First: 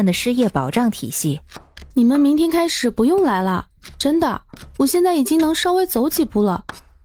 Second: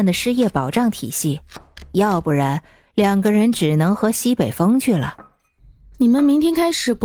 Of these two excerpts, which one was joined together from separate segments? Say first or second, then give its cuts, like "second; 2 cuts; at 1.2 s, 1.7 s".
first; 1 cut; at 1.9 s